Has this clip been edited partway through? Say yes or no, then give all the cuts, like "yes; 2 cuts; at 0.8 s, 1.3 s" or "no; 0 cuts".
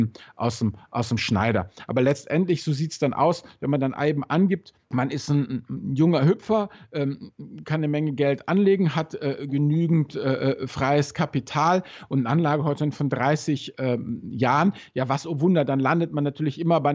yes; 1 cut; at 4.9 s